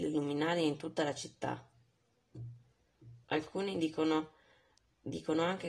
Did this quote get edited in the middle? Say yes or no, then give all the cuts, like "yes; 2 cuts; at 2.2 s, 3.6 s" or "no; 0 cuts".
yes; 1 cut; at 3.2 s